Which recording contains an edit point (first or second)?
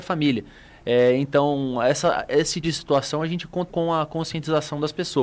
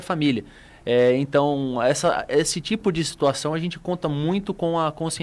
first